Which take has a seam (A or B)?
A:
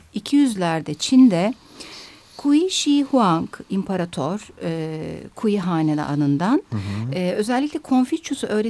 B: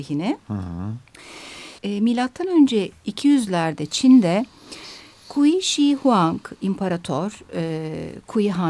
B